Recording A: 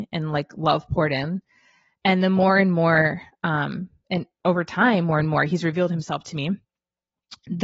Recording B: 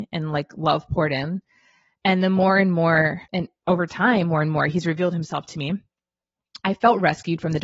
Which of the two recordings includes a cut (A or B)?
B